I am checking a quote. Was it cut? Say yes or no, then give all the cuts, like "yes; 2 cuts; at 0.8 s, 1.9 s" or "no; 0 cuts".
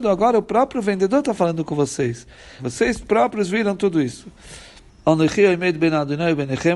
yes; 2 cuts; at 2.6 s, 4.9 s